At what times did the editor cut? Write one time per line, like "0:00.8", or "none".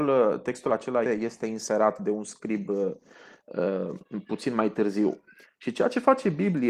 0:01.0
0:05.4